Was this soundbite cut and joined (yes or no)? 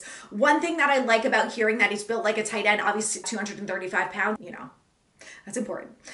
yes